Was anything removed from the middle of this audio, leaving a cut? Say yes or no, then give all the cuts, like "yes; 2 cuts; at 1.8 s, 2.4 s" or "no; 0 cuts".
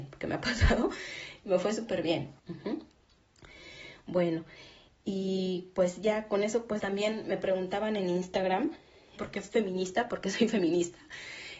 yes; 3 cuts; at 2.4 s, 6.8 s, 9.2 s